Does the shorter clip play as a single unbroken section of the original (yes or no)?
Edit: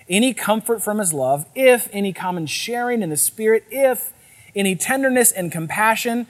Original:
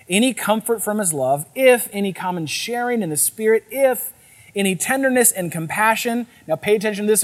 yes